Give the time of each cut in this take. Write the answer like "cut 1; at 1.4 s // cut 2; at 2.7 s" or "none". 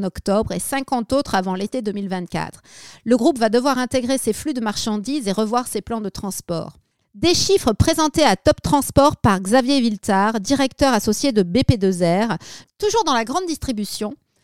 cut 1; at 7.0 s // cut 2; at 12.6 s